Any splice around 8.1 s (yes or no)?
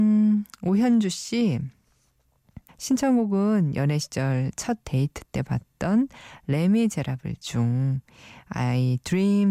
no